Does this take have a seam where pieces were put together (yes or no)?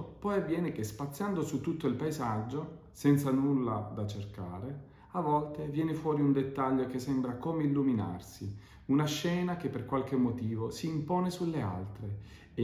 no